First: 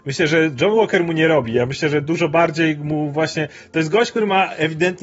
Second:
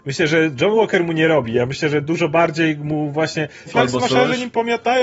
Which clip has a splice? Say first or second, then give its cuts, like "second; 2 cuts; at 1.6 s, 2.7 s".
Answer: second; 1 cut; at 3.7 s